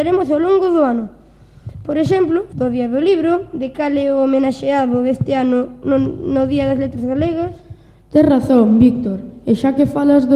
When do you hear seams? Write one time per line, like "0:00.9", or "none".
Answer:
0:02.5